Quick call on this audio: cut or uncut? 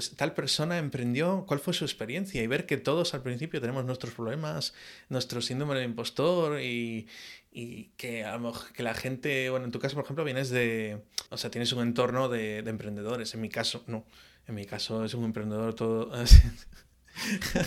cut